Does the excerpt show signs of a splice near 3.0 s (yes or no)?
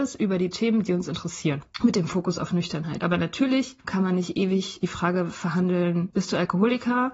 no